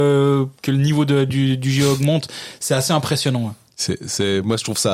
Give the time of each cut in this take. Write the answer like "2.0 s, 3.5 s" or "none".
none